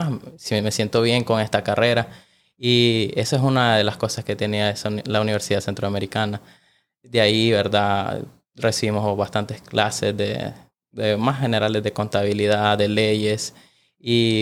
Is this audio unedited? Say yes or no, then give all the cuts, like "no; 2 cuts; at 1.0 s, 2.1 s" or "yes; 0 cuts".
yes; 0 cuts